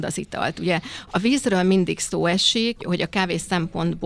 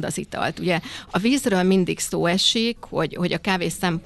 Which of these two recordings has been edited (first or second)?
first